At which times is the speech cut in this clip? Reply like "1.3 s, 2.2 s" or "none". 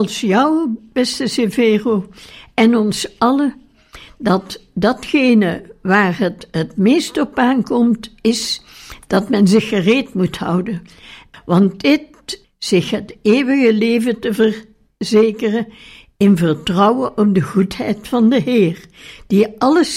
11.3 s, 12.4 s

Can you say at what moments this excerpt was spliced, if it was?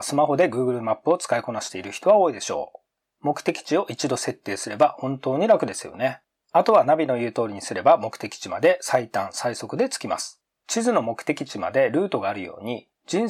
10.5 s

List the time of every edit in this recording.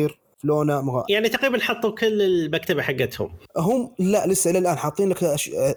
1.0 s, 3.5 s

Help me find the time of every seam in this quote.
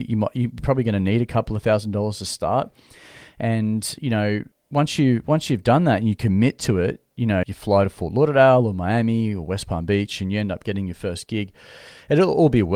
4.5 s, 7.4 s

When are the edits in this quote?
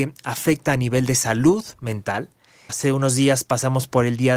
2.7 s

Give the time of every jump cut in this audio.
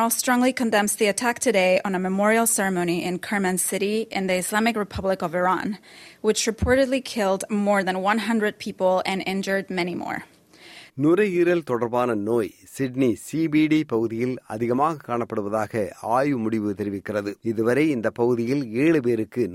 10.9 s, 17.4 s

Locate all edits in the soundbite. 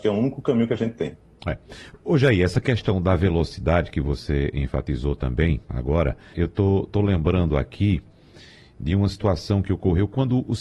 6.3 s

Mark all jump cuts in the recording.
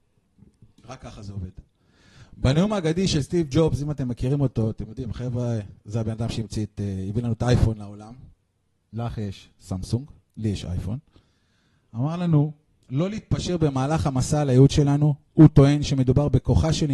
none

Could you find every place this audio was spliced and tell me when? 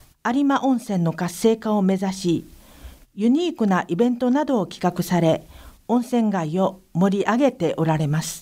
none

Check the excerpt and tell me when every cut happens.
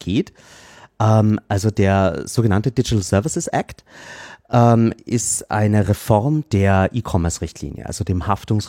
none

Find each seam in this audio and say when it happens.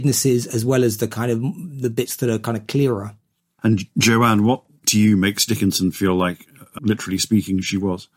6.8 s

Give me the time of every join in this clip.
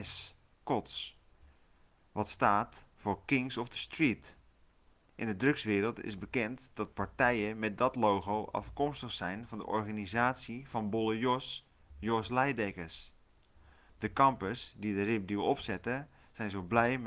none

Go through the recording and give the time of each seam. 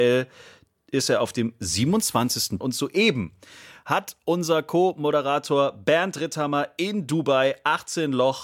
2.6 s

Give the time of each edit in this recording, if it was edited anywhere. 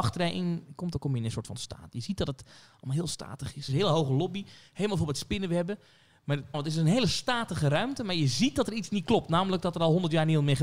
3.7 s, 6.5 s

